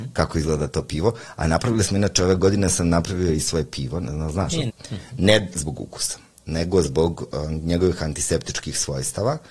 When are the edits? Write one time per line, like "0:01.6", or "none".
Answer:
0:04.7